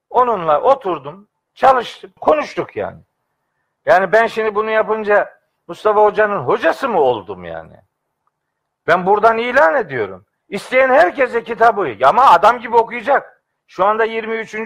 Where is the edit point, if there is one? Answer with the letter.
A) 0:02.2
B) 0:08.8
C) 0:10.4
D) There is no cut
A